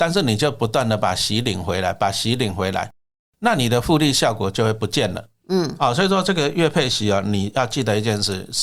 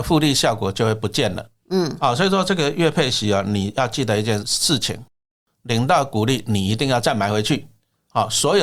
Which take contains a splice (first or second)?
second